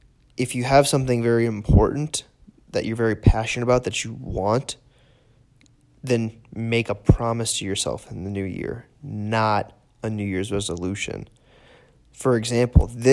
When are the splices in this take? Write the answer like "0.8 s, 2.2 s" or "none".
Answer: none

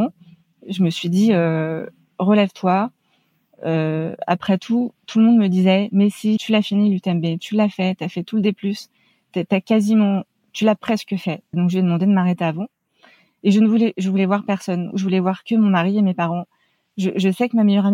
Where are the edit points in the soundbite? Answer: 6.4 s, 11.5 s

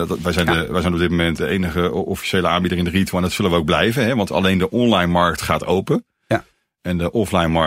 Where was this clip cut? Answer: none

